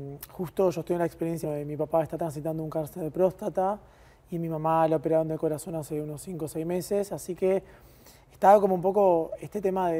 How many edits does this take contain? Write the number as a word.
one